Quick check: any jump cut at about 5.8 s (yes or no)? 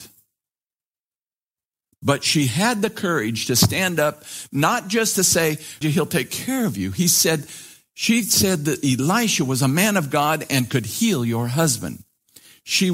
yes